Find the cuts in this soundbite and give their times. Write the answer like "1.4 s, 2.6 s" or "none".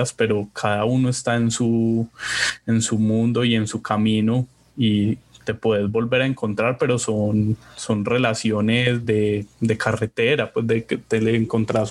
none